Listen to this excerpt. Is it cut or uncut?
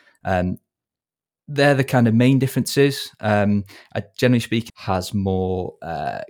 cut